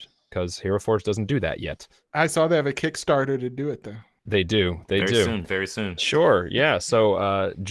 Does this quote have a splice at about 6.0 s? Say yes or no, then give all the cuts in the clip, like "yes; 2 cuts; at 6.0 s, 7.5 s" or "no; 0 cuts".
yes; 1 cut; at 6.0 s